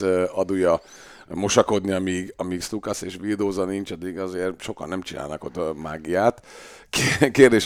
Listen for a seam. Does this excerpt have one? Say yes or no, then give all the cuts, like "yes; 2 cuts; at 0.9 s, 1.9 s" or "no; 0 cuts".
no; 0 cuts